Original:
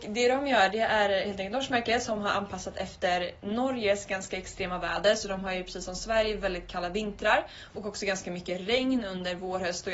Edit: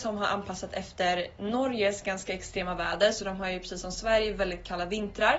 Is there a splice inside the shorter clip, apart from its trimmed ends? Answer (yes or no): no